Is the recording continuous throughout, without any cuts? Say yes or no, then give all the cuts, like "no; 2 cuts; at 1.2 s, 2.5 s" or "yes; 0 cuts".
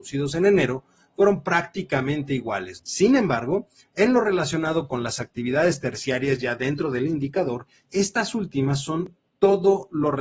no; 1 cut; at 2.8 s